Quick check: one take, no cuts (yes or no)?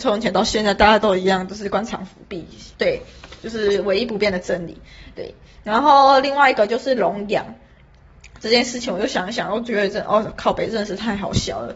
no